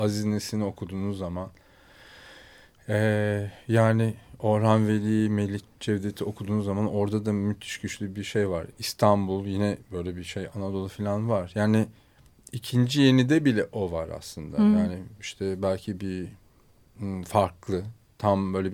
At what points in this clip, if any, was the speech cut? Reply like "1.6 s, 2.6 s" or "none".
none